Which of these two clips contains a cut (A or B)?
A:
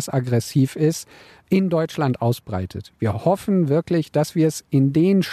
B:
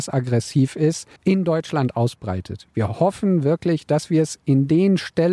B